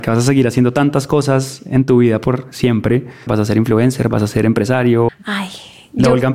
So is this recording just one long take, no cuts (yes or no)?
no